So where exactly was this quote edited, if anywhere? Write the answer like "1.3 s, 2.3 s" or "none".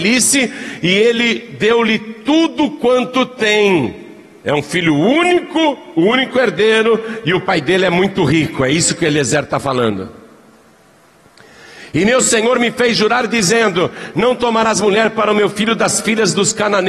none